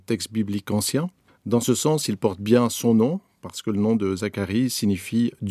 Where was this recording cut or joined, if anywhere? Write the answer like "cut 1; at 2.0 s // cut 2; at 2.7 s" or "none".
cut 1; at 1.3 s